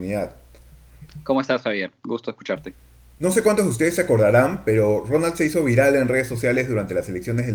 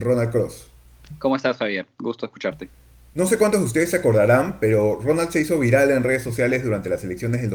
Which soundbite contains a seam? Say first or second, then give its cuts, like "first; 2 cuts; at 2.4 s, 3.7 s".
first; 1 cut; at 1.1 s